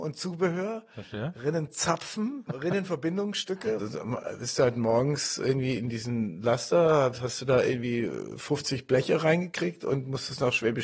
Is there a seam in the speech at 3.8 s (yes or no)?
yes